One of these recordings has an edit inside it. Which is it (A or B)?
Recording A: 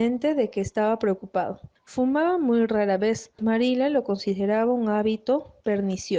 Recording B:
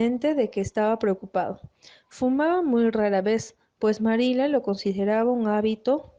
A